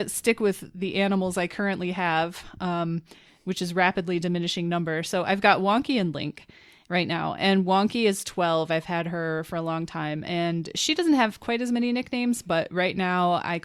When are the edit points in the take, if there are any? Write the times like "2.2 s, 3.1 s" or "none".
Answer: none